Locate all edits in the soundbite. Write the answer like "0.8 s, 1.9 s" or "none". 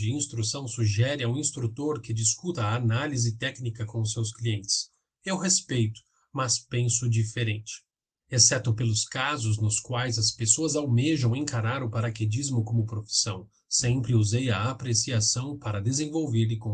8.2 s